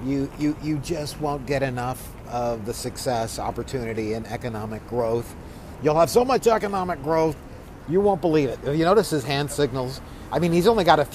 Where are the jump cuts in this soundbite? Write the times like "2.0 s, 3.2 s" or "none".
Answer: none